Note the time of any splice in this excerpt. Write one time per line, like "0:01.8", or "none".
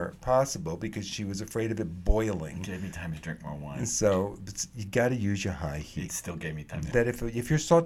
0:06.9